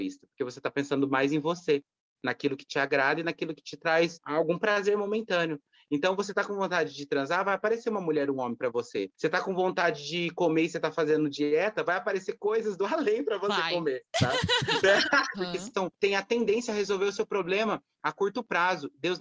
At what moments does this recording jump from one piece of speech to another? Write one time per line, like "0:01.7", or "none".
0:05.9
0:15.3